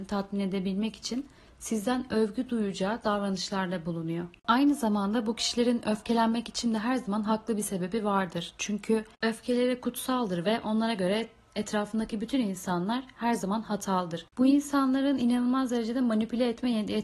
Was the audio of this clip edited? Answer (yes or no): no